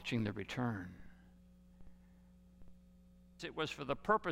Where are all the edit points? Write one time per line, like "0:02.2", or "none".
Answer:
0:03.4